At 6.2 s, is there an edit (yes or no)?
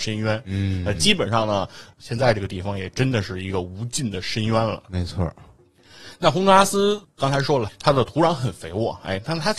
no